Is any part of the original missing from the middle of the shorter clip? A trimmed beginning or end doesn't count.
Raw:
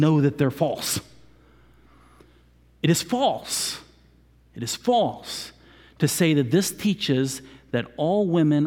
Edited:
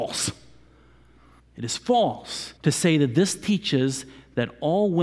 yes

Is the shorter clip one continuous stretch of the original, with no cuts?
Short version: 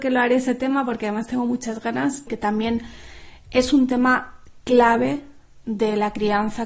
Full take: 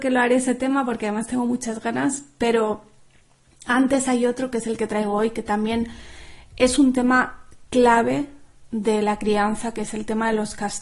no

